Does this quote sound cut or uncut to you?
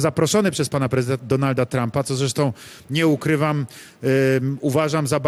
cut